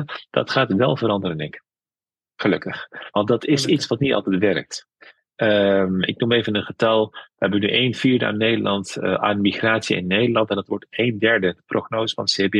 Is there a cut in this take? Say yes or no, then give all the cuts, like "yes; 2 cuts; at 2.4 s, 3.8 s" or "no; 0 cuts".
no; 0 cuts